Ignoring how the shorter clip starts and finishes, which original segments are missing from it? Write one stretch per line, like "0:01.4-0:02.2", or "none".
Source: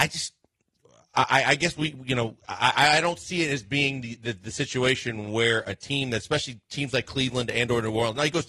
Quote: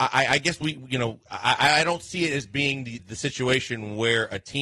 0:04.2-0:04.3